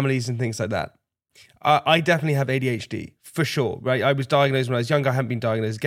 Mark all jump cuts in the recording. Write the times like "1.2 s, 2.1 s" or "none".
none

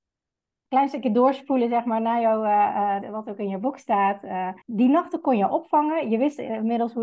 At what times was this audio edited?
3.0 s, 4.6 s

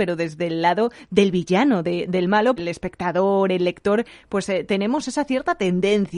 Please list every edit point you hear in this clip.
2.6 s

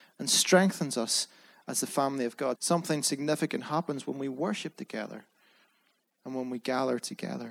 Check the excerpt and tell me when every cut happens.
2.6 s

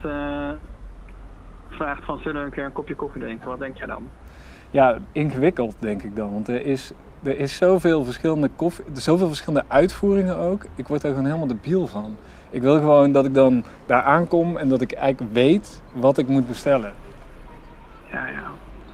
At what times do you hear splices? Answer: none

